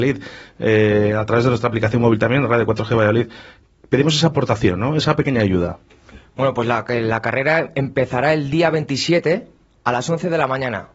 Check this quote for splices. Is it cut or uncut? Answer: uncut